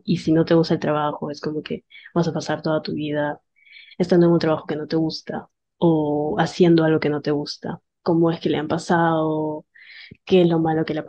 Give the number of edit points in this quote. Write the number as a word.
one